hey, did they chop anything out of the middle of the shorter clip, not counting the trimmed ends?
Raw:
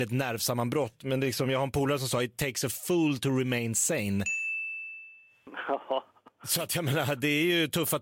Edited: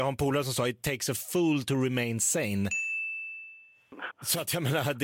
yes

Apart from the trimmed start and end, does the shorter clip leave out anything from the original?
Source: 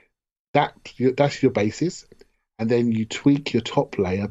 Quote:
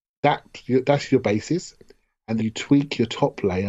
yes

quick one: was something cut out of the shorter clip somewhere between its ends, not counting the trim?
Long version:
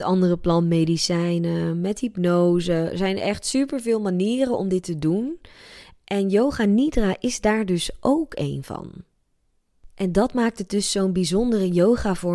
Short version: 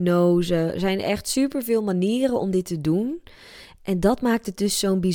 yes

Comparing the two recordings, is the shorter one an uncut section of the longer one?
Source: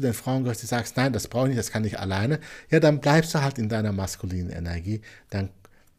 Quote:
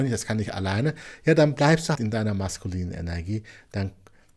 no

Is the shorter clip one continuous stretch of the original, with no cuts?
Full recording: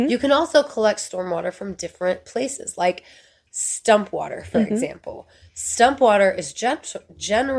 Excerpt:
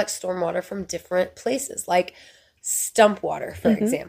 yes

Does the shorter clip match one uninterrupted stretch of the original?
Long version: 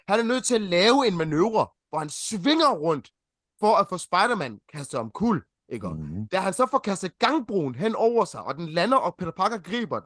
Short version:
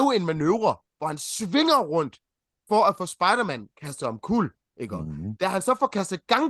yes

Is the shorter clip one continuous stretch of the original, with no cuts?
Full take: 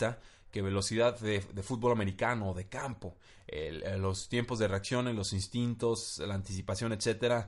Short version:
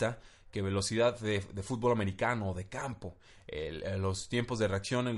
yes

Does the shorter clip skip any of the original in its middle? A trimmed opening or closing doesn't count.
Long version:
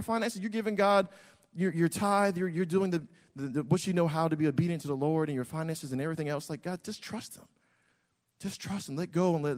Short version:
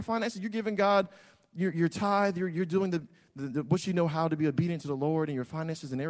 no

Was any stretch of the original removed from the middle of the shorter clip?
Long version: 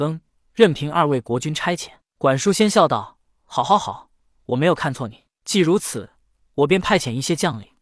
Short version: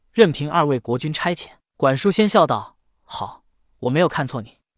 yes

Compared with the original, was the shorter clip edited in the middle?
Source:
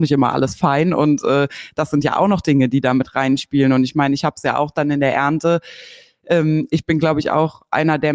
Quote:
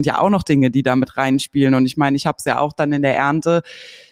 no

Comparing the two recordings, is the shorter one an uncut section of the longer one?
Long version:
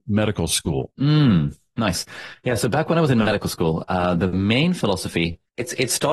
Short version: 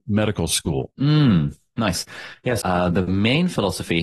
no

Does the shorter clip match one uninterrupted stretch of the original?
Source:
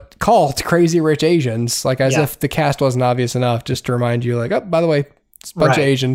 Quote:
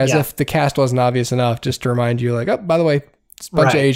yes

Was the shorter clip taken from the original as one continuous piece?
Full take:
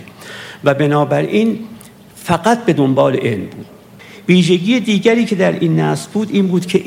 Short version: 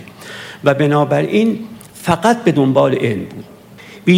no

